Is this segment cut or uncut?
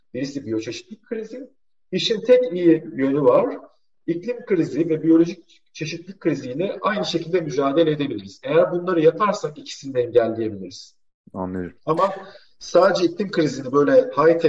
uncut